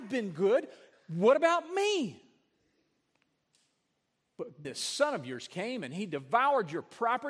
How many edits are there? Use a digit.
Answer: 1